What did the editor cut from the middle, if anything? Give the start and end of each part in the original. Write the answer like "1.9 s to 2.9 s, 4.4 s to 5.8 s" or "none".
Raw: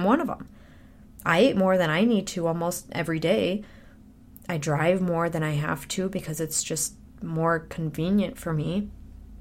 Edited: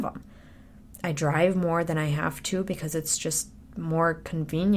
1.2 s to 4.4 s

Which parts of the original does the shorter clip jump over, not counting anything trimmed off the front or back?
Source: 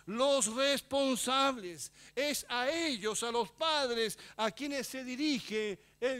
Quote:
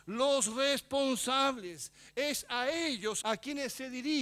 3.2 s to 4.3 s

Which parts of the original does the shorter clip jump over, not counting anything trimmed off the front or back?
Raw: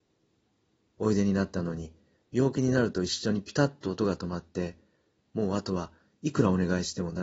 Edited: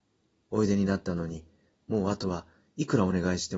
2.2 s to 5.2 s

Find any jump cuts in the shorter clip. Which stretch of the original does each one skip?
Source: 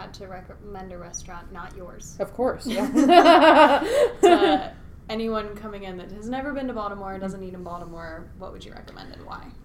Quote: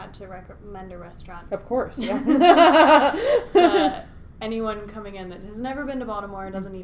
1.5 s to 2.2 s

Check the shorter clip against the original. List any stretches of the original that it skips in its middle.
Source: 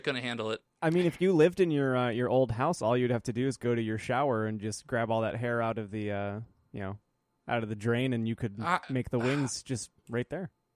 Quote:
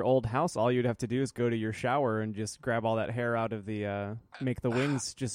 6.6 s to 8.8 s

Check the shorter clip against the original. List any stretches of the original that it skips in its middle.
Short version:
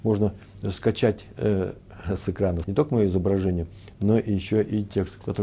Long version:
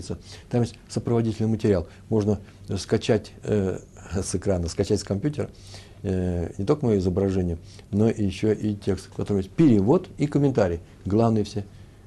4.7 s to 6.5 s

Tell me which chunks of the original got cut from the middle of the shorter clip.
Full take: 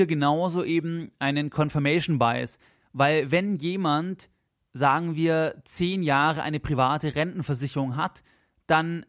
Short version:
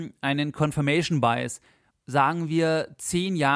2.9 s to 4.6 s

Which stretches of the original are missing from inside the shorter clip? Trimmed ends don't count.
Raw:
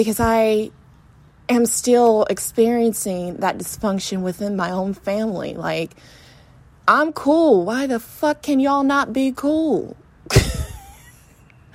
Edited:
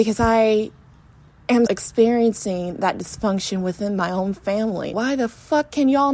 1.7 s to 2.3 s, 5.5 s to 7.6 s

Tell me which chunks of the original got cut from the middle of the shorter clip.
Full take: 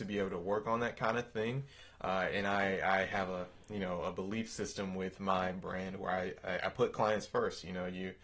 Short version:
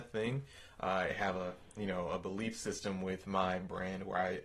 2.3 s to 3.0 s

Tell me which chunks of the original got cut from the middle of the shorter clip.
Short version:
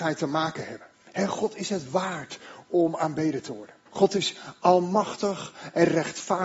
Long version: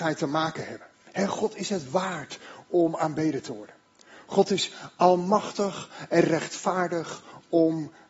3.9 s to 4.2 s

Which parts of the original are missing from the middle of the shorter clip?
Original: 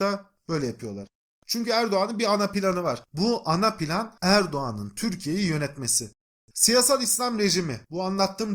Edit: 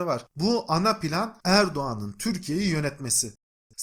none

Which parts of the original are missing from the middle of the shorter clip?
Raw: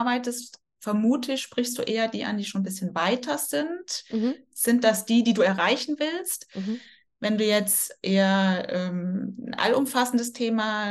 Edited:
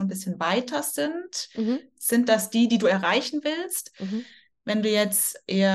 none

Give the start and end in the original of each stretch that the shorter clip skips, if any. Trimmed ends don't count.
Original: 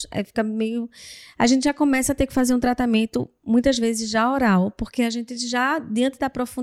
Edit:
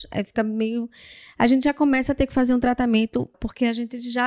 3.3 s to 4.7 s

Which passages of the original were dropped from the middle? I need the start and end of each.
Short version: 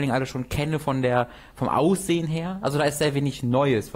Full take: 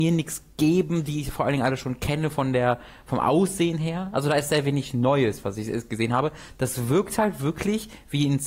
none

